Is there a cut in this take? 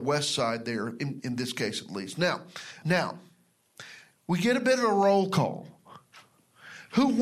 yes; 3 cuts; at 1.2 s, 2.8 s, 4.1 s

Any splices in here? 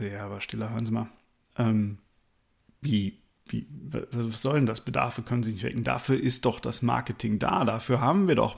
no; 0 cuts

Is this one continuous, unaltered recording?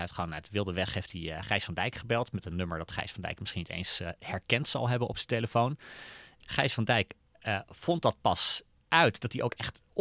yes; 0 cuts

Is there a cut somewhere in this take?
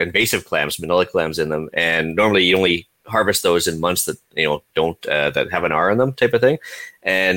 yes; 1 cut; at 3.0 s

